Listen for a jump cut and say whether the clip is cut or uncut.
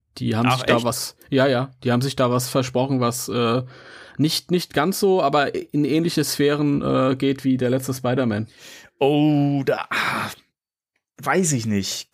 uncut